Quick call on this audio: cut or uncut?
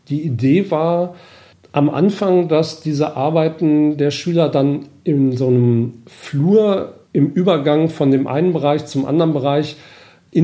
cut